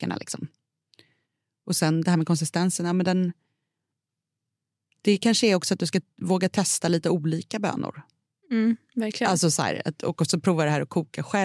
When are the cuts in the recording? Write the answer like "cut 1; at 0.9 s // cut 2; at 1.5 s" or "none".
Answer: none

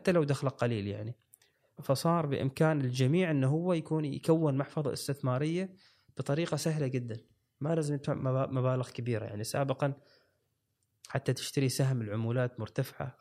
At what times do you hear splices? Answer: cut 1; at 1.8 s

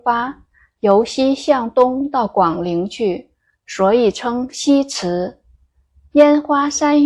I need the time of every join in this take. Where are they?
none

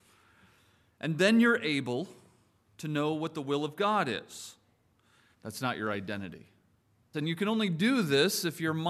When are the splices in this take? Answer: cut 1; at 5.3 s // cut 2; at 7.1 s

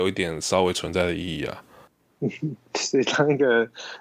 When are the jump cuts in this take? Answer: none

